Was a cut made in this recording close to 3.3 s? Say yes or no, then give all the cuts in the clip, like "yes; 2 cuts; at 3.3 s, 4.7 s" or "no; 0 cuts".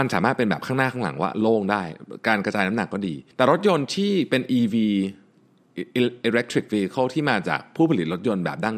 yes; 1 cut; at 3.3 s